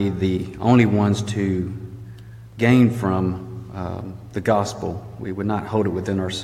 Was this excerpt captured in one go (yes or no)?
yes